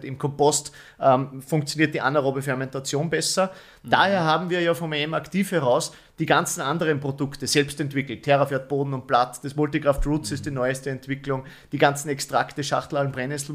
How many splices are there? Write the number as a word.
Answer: zero